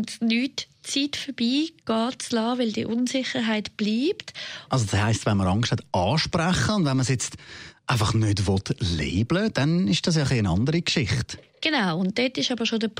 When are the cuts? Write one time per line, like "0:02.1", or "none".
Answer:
0:04.7